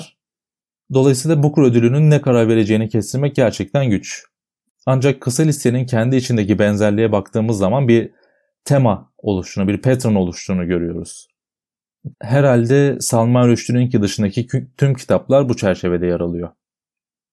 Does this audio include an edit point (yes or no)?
yes